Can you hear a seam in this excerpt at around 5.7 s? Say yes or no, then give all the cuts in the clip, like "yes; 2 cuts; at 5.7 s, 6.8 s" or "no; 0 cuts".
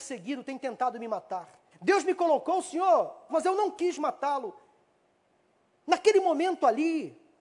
no; 2 cuts; at 1.7 s, 3.3 s